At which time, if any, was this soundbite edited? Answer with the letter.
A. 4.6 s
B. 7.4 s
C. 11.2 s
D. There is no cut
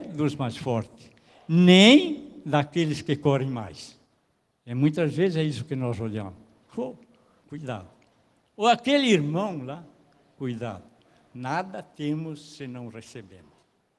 B